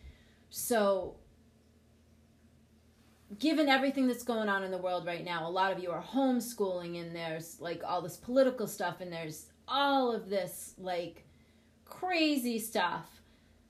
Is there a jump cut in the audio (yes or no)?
yes